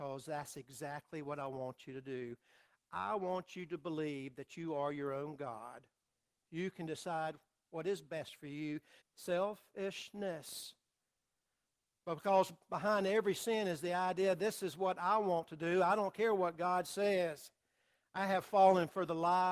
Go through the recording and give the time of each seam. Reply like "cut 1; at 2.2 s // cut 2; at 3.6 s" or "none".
cut 1; at 9.0 s

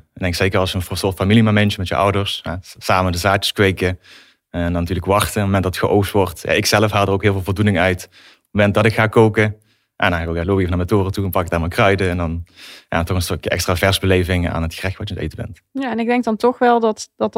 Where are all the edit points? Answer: none

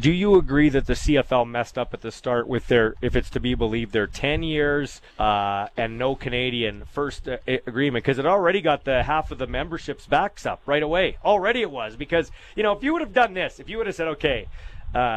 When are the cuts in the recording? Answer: cut 1; at 5.1 s

